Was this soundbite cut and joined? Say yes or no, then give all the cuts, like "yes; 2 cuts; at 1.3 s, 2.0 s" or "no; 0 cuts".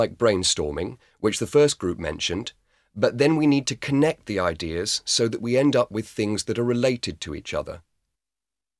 no; 0 cuts